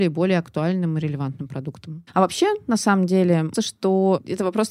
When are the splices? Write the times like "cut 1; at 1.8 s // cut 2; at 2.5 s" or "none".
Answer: cut 1; at 2.1 s // cut 2; at 3.5 s